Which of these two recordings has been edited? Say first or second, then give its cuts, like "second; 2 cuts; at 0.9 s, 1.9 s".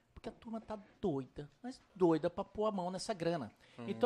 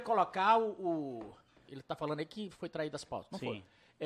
second; 1 cut; at 1.7 s